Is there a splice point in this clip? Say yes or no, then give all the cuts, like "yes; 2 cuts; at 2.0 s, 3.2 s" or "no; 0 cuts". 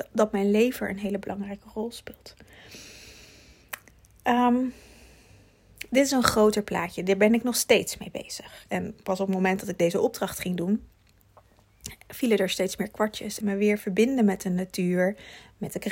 yes; 2 cuts; at 8.7 s, 13.4 s